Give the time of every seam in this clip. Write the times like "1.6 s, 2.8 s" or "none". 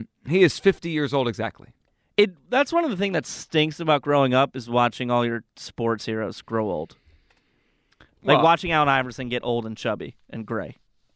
none